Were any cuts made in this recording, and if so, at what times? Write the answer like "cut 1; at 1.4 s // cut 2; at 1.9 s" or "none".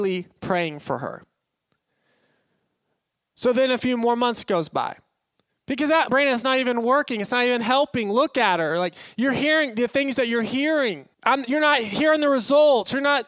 cut 1; at 6.1 s // cut 2; at 11.1 s